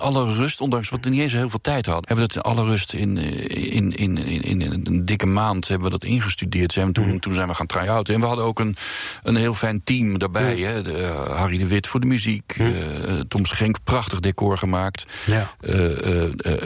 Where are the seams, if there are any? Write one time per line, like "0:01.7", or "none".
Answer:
0:02.0